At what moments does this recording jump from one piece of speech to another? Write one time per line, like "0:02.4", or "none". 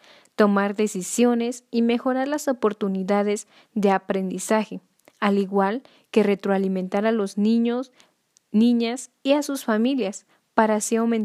none